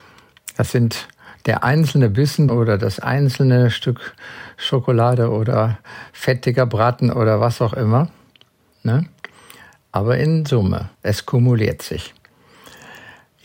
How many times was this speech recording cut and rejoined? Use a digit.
3